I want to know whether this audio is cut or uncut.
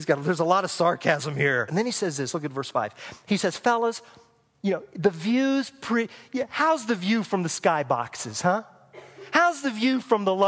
cut